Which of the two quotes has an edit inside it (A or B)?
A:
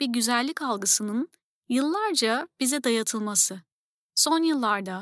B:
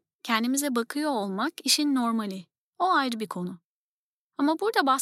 B